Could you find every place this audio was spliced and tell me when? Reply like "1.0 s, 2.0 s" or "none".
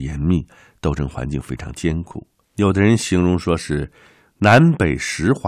2.4 s